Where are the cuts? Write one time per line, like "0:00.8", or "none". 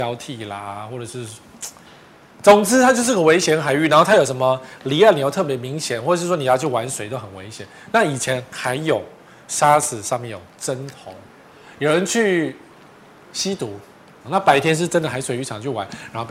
0:14.2